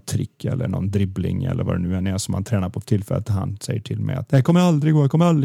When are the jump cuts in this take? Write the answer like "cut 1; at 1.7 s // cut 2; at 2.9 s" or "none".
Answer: none